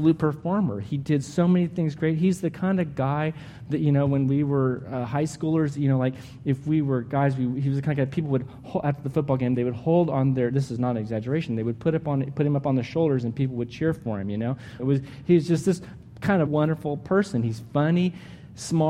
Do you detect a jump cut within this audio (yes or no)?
yes